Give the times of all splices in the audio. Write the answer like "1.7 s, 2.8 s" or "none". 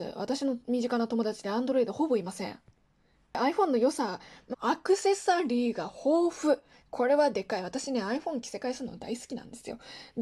4.5 s